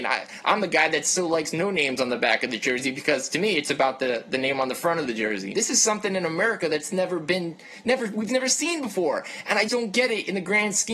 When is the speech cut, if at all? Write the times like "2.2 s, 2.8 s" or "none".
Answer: 5.5 s, 9.7 s